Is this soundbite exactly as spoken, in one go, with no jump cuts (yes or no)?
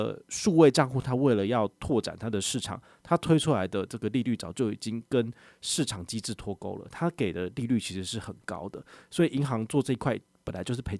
yes